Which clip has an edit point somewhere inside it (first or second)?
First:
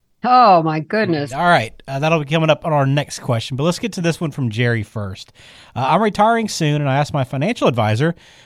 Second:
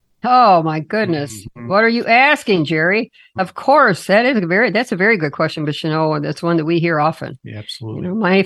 first